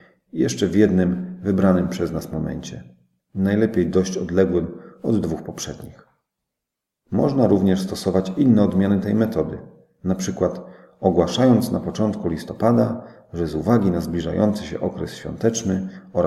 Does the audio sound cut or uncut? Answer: uncut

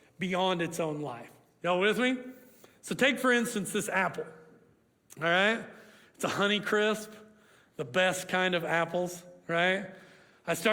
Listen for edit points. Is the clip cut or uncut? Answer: uncut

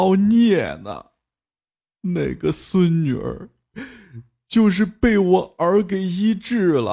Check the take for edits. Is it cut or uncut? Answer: uncut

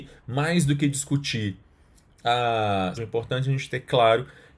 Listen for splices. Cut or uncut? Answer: cut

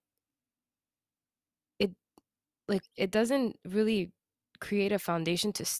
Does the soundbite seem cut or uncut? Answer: cut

